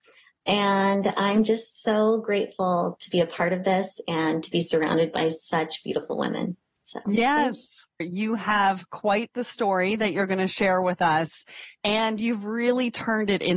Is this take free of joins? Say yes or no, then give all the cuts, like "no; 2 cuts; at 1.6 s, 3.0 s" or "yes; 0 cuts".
no; 1 cut; at 8.0 s